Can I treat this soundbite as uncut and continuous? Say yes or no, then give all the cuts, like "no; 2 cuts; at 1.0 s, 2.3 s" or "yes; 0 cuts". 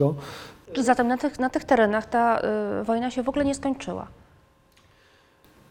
yes; 0 cuts